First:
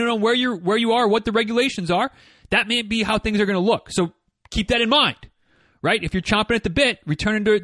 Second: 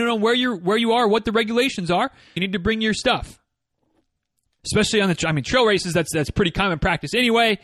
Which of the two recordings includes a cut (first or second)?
second